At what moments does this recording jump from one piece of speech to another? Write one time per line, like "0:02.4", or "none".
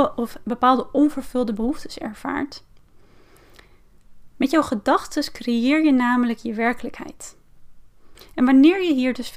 0:08.1